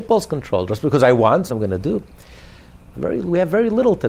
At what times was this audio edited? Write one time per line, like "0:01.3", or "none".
0:01.5
0:02.9